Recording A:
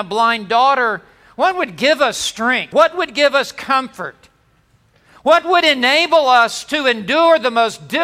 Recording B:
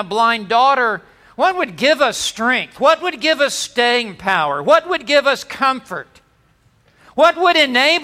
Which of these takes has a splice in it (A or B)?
A